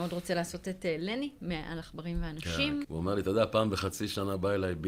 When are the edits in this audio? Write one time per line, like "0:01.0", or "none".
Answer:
0:02.8